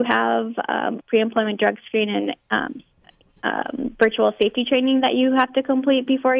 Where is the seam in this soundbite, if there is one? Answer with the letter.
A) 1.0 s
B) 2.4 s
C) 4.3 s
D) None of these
A